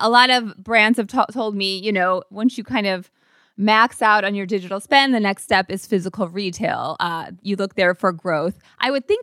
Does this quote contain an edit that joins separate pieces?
no; 0 cuts

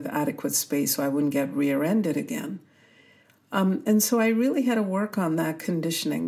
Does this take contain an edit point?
no; 0 cuts

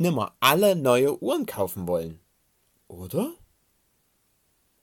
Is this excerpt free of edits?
yes; 0 cuts

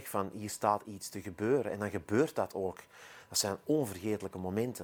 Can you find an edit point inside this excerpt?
no; 0 cuts

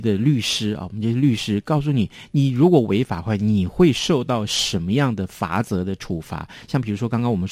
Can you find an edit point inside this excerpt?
no; 0 cuts

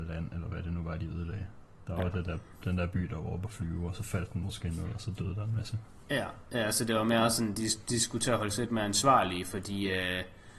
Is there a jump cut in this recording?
no; 0 cuts

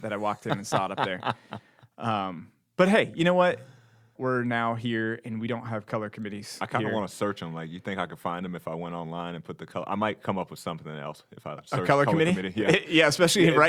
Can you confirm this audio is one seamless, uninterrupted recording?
no; 1 cut; at 4.2 s

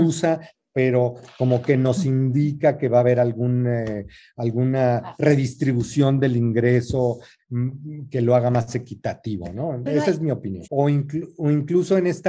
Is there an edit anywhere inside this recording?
yes; 1 cut; at 10.6 s

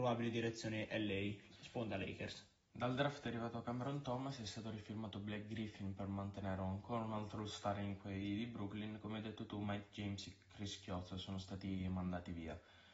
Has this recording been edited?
no; 0 cuts

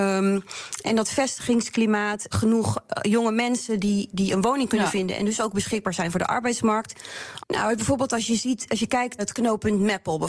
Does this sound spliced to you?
yes; 3 cuts; at 2.3 s, 7.4 s, 9.2 s

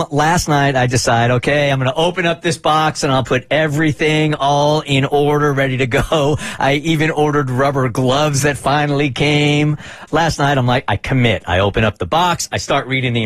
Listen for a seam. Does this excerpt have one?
yes; 1 cut; at 10.1 s

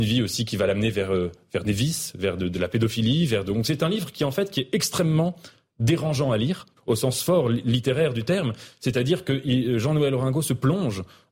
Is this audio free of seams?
no; 1 cut; at 6.8 s

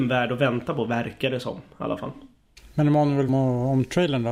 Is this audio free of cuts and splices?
no; 1 cut; at 3.3 s

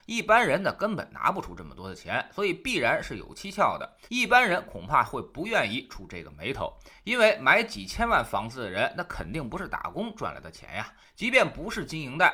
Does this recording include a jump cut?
yes; 2 cuts; at 4.1 s, 11.0 s

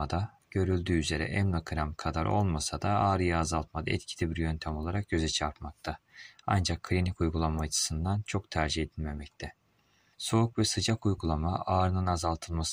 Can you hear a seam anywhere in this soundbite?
yes; 1 cut; at 10.1 s

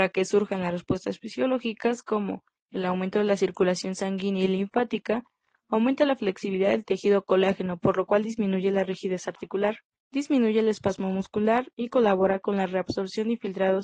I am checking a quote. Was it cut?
yes; 1 cut; at 9.9 s

